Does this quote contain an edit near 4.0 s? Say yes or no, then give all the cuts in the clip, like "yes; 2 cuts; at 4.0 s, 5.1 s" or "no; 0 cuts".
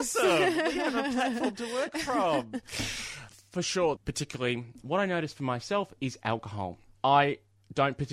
yes; 1 cut; at 4.0 s